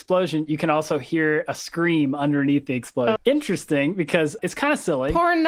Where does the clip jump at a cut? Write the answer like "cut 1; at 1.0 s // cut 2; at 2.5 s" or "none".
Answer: cut 1; at 3.2 s // cut 2; at 4.4 s